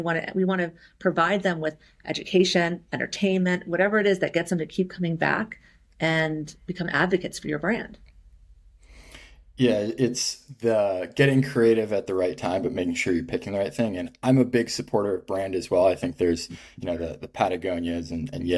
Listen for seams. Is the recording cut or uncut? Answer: uncut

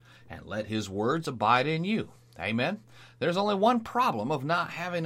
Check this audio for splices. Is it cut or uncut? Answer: uncut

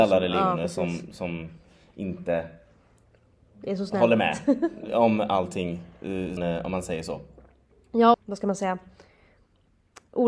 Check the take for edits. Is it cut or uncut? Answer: cut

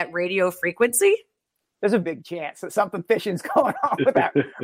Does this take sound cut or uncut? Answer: cut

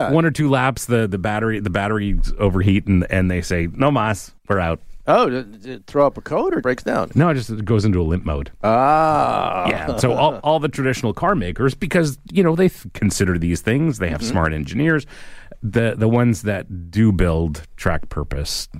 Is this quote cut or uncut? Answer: cut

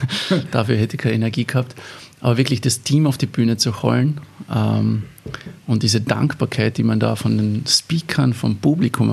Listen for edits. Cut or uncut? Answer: uncut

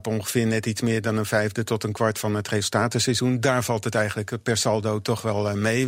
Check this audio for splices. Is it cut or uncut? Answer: uncut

